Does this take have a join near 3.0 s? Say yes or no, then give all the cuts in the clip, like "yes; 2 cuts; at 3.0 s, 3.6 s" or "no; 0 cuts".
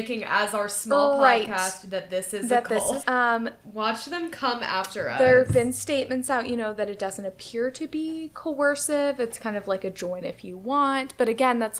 yes; 1 cut; at 3.0 s